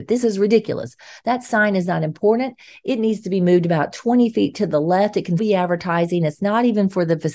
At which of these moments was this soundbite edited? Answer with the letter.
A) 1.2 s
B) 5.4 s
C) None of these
B